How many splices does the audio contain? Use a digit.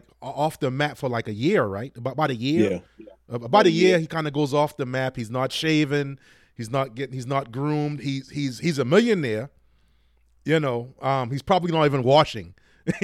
0